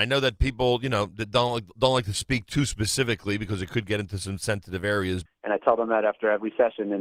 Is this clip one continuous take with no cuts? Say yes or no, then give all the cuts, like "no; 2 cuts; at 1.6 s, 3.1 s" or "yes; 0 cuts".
no; 1 cut; at 5.3 s